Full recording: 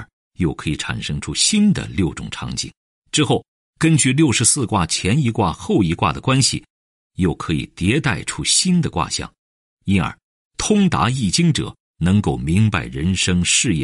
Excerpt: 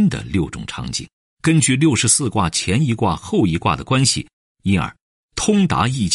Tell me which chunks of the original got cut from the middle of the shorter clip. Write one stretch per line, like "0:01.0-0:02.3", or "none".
0:02.9-0:03.6
0:06.8-0:09.6